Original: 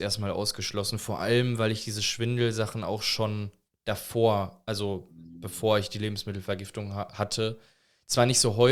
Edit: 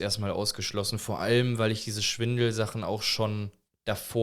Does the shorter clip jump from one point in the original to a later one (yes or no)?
no